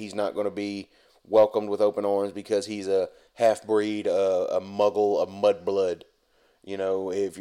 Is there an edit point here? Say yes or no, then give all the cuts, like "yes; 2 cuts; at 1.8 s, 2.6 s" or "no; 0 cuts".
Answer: no; 0 cuts